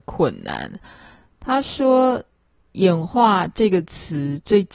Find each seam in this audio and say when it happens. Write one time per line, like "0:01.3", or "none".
none